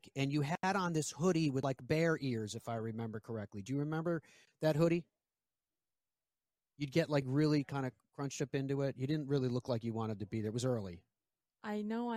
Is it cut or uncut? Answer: uncut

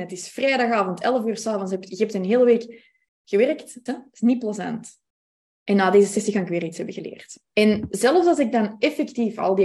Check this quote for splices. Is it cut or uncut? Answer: cut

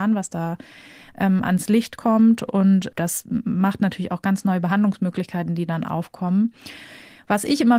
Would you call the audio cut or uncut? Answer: uncut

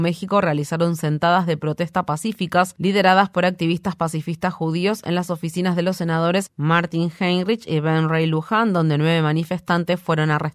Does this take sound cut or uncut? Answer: uncut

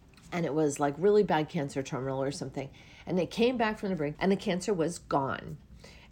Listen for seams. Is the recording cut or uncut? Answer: cut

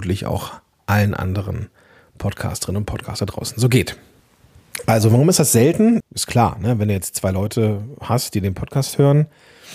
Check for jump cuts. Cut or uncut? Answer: cut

